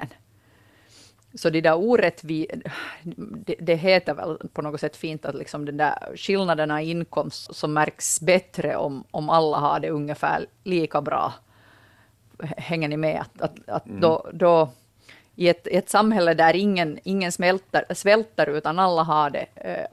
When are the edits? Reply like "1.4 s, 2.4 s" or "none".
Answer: 7.5 s